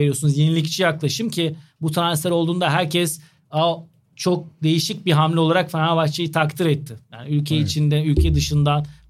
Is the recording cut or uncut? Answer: uncut